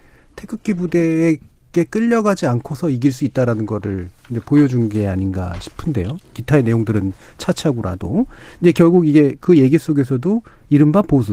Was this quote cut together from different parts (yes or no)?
no